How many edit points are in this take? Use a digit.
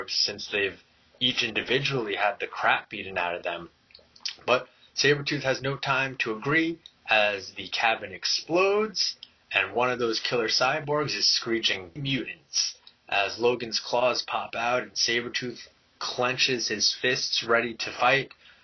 1